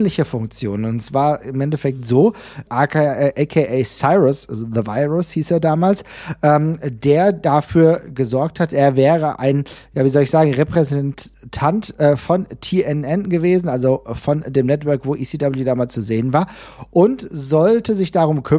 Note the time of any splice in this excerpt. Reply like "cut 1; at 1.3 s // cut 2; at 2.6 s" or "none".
cut 1; at 2.6 s